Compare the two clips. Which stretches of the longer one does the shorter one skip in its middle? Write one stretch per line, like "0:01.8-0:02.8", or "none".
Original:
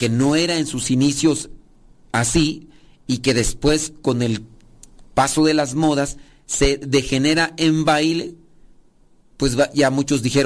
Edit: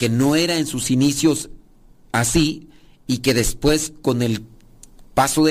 none